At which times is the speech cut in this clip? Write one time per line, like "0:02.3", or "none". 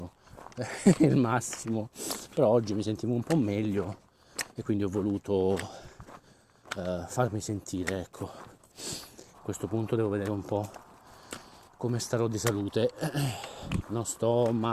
0:09.3
0:13.8